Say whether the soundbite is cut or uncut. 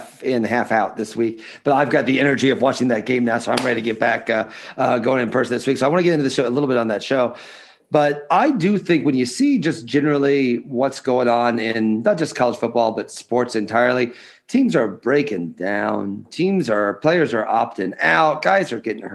uncut